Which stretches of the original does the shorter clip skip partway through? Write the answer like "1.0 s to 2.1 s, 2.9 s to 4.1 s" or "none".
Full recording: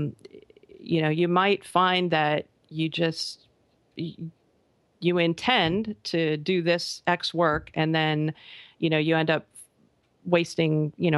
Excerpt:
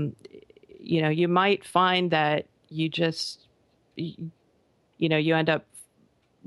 4.9 s to 8.7 s